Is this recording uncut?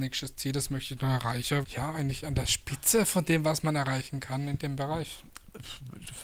no; 1 cut; at 1.6 s

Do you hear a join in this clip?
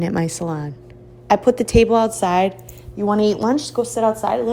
no; 0 cuts

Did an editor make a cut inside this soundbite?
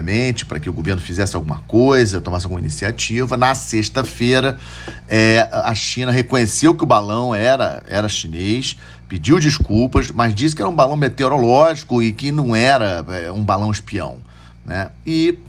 no; 0 cuts

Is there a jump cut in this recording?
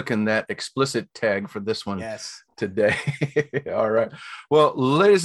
no; 0 cuts

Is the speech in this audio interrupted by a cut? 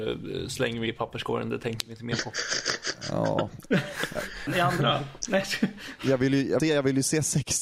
yes; 2 cuts; at 4.5 s, 6.6 s

